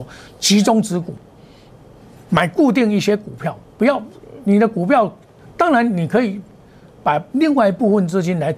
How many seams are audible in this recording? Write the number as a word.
two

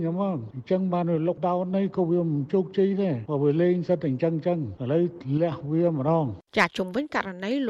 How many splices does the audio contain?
one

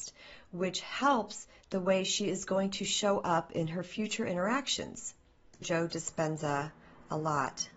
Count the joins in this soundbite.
one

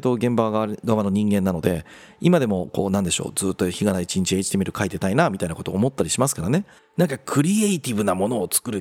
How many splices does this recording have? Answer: one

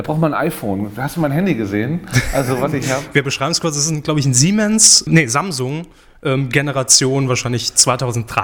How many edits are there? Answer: one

